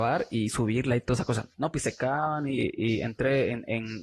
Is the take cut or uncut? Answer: cut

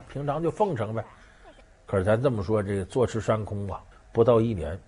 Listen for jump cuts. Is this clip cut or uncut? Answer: cut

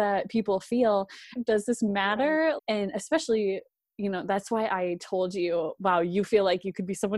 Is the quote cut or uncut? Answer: cut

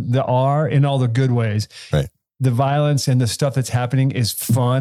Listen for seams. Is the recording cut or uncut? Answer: uncut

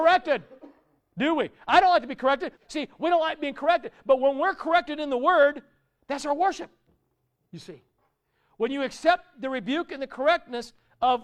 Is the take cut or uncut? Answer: cut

